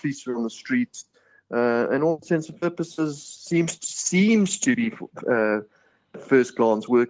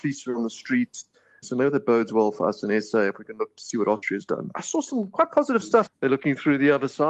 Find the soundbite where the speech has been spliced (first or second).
second